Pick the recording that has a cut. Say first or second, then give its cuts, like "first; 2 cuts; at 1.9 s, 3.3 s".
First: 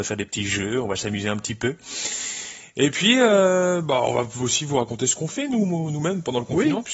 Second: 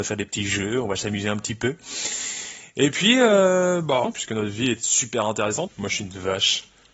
second; 2 cuts; at 4.0 s, 5.7 s